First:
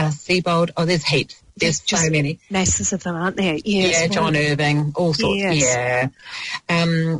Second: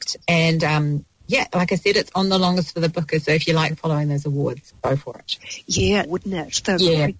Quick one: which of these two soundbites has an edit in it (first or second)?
second